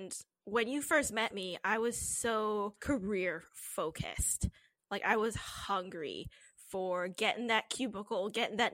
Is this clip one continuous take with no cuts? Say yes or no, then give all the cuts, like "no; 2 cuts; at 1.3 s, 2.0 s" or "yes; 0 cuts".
yes; 0 cuts